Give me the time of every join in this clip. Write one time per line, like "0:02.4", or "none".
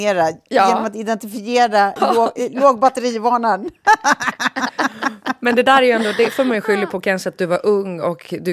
0:02.0